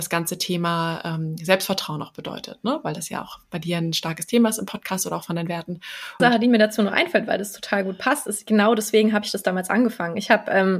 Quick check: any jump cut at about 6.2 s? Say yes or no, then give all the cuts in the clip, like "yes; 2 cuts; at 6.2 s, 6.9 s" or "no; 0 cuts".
yes; 1 cut; at 6.2 s